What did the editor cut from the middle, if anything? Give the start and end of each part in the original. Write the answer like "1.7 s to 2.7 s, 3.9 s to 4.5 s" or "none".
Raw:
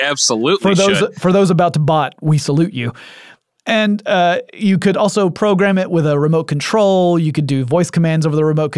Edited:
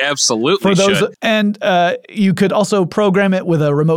1.1 s to 3.6 s